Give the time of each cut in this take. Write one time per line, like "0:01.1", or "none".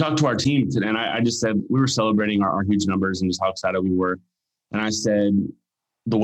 none